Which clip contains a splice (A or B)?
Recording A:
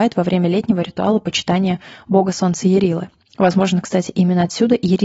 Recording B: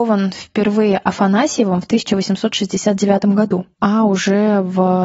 B